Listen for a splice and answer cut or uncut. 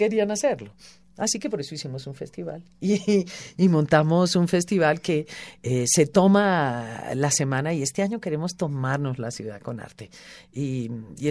uncut